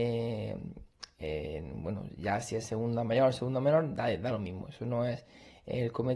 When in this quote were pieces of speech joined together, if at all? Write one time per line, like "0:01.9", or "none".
none